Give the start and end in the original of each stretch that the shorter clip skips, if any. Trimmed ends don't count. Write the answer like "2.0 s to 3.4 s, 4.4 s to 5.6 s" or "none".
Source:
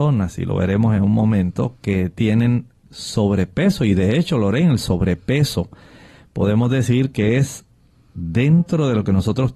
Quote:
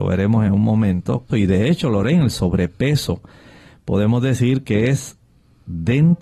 1.8 s to 3.8 s